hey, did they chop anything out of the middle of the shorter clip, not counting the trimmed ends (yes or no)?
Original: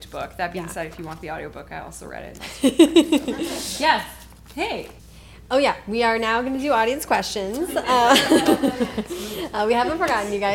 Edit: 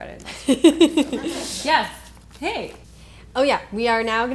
no